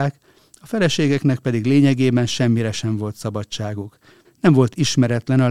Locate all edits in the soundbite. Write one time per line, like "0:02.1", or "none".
0:04.2